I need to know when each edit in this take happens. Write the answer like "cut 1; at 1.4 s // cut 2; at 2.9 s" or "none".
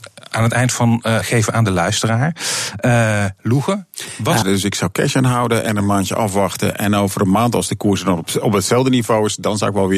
cut 1; at 1.2 s // cut 2; at 4.4 s